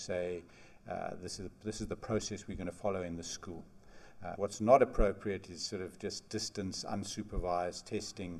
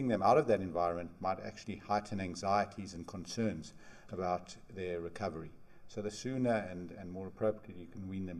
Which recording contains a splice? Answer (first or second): first